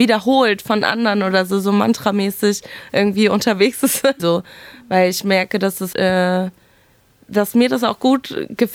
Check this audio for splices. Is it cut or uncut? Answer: cut